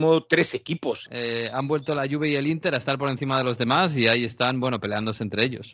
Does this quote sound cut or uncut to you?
cut